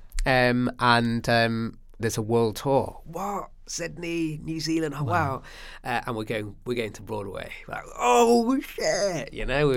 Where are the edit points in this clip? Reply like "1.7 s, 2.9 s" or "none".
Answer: 2.0 s